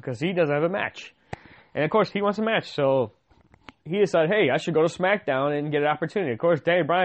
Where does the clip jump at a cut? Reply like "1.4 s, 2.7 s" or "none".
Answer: 3.8 s